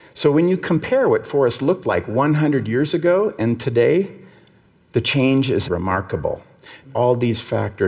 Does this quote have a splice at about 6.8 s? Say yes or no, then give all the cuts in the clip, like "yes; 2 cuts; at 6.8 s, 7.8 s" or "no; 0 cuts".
yes; 2 cuts; at 5.7 s, 6.8 s